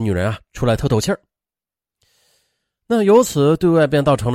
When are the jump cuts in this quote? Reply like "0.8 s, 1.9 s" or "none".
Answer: none